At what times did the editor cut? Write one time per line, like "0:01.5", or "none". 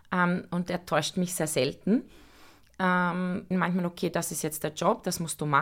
0:03.5